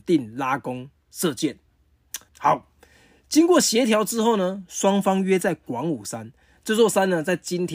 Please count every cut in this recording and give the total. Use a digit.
1